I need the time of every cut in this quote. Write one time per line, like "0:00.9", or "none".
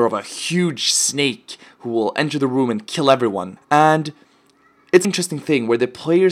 0:03.6
0:05.0

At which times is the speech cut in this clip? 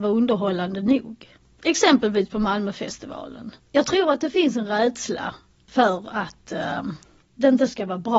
none

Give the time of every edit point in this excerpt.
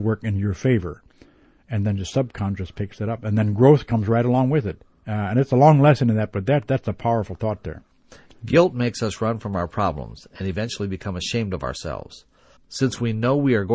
0:12.6

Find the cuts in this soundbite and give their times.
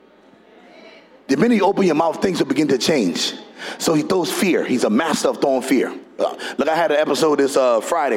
0:06.2

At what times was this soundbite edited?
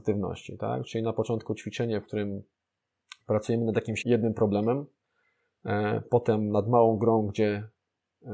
0:04.0

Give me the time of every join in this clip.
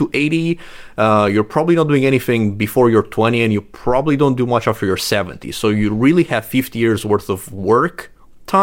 none

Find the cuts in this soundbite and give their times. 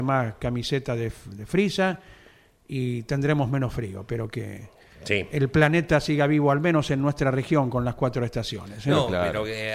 none

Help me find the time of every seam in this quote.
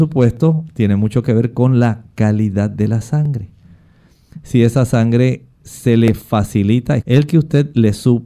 0:07.0

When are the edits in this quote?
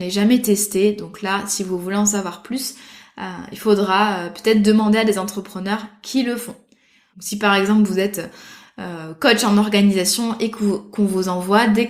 0:07.1

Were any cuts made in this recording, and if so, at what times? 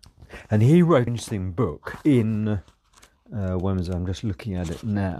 0:01.1

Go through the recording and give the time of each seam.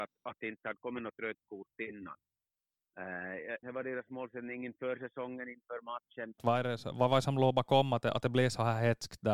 0:03.6
0:06.4

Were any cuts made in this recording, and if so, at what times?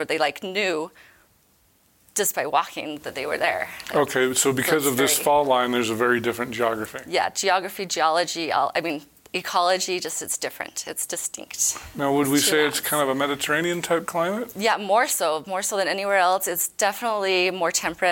none

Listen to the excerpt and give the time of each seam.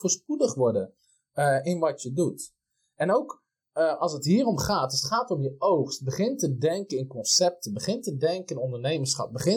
none

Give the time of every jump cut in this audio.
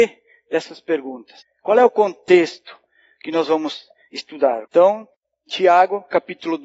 0:04.7

